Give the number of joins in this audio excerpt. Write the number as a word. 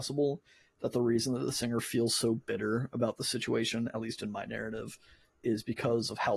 zero